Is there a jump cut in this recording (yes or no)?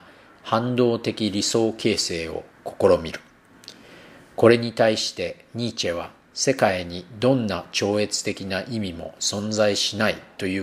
no